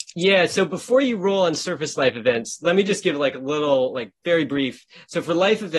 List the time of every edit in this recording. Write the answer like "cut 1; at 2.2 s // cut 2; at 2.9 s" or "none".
none